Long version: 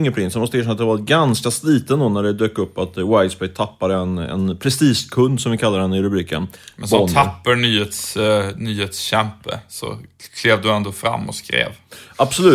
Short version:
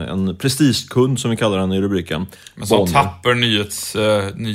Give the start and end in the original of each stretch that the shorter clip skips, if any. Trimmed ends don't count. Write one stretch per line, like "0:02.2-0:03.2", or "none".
none